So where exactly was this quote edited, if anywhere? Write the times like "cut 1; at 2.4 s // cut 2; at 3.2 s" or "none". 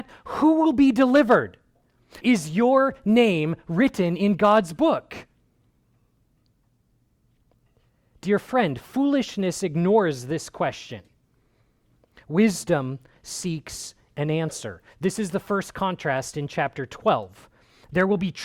cut 1; at 2.2 s

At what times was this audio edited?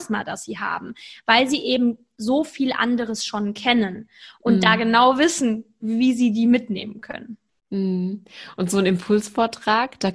none

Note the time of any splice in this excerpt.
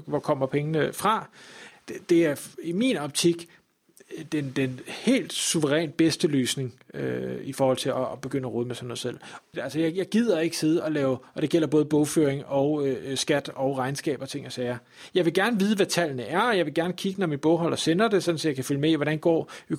cut 1; at 1.7 s // cut 2; at 9.5 s

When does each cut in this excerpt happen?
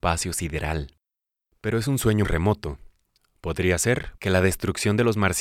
cut 1; at 2.2 s // cut 2; at 4.2 s

